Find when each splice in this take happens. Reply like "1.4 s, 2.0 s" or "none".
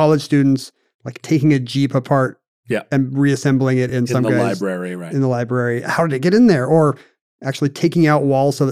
none